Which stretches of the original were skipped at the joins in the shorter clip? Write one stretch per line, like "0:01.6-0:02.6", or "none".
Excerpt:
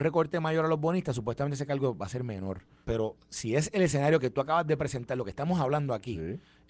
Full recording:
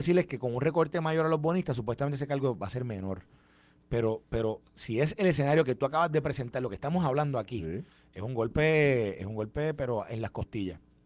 0:03.4-0:04.3